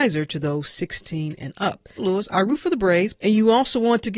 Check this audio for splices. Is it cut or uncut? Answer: cut